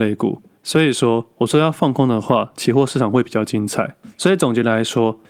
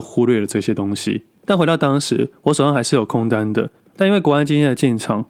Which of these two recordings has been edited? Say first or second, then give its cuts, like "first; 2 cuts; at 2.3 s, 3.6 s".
second; 2 cuts; at 1.4 s, 3.9 s